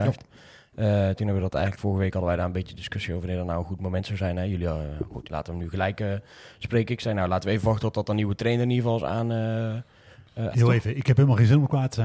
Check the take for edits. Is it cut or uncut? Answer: cut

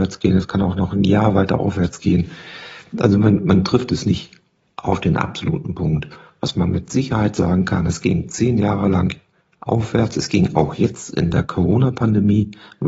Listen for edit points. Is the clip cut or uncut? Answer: uncut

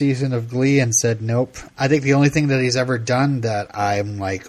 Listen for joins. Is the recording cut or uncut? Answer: cut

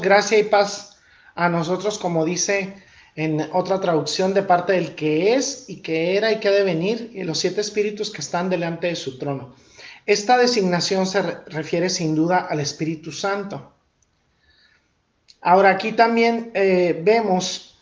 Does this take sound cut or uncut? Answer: uncut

